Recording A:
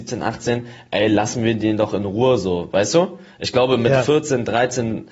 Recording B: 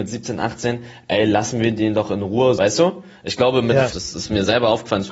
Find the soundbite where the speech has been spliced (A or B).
B